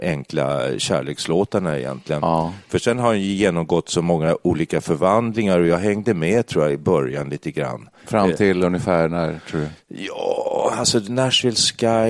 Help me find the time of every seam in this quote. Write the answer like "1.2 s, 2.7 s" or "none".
8.0 s